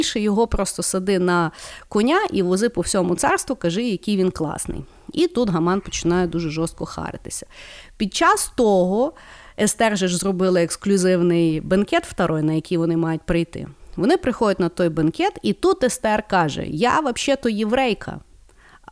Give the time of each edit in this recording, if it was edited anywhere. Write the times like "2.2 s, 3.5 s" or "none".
none